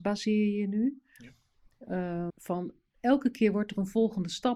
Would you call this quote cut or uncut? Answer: cut